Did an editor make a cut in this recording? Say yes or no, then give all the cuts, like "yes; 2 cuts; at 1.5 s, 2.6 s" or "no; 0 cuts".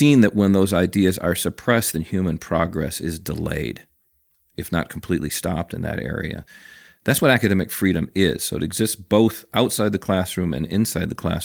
no; 0 cuts